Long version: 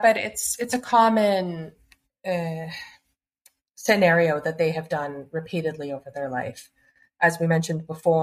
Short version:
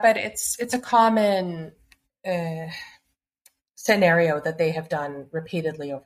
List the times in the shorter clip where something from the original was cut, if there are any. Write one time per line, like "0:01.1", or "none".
none